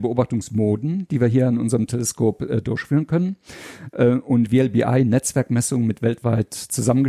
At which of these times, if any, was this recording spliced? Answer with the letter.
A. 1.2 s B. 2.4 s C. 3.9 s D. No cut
D